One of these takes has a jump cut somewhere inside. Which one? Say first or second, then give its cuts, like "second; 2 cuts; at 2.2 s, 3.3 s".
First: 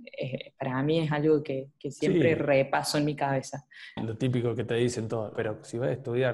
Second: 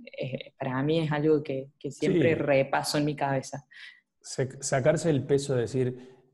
first; 2 cuts; at 4.0 s, 5.4 s